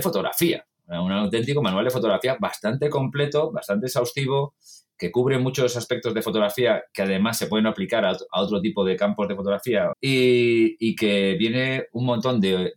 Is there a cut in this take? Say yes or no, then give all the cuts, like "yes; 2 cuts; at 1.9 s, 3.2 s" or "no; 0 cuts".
yes; 1 cut; at 9.9 s